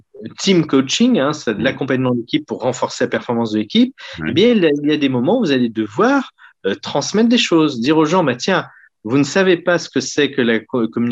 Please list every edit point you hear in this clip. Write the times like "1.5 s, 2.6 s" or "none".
none